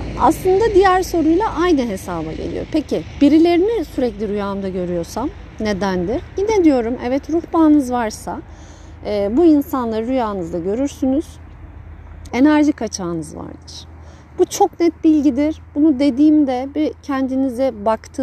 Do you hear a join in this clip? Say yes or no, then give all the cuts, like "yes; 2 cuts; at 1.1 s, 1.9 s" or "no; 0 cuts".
yes; 1 cut; at 12.3 s